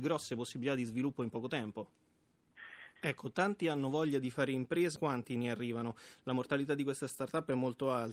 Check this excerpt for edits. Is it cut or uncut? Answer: cut